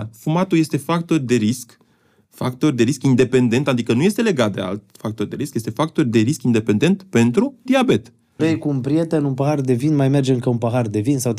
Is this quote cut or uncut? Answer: cut